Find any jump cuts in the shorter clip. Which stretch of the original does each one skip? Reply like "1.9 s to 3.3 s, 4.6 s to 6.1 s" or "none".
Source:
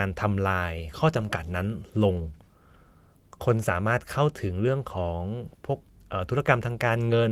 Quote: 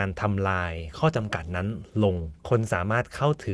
2.4 s to 3.4 s